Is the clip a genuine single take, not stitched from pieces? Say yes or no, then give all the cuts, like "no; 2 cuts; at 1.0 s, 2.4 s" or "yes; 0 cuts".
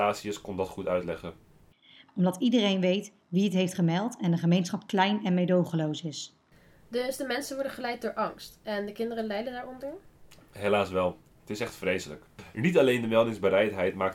no; 1 cut; at 2.1 s